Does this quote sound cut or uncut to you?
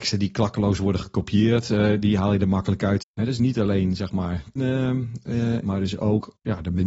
cut